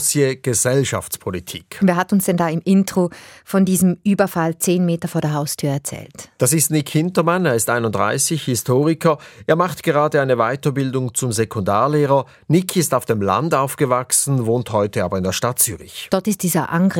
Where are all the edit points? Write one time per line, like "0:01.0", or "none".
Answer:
none